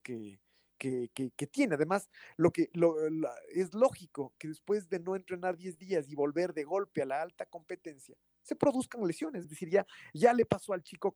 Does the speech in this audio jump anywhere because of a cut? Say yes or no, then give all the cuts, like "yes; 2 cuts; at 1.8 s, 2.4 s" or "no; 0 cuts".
yes; 1 cut; at 9.4 s